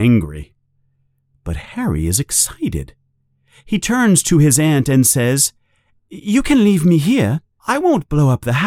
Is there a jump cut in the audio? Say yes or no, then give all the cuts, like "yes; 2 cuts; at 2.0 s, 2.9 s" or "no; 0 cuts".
no; 0 cuts